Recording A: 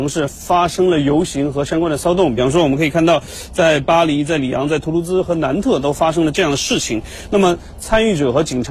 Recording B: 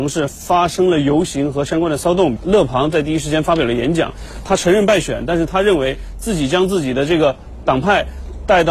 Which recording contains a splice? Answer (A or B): B